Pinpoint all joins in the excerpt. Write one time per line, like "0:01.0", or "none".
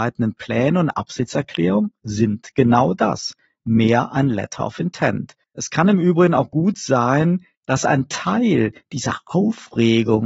none

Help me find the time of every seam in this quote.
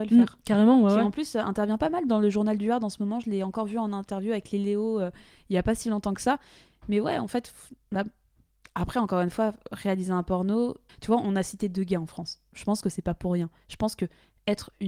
0:10.9

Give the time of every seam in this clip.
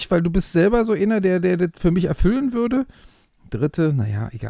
none

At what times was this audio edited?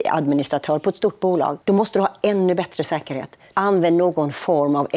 0:01.6
0:03.5

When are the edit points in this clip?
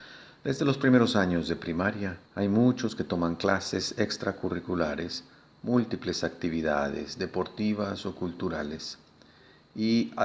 0:02.3

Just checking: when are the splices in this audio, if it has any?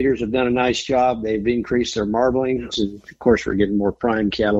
0:02.7

